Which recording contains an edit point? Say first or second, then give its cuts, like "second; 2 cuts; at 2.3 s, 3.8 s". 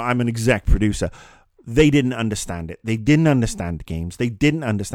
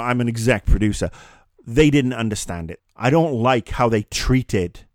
second; 1 cut; at 2.8 s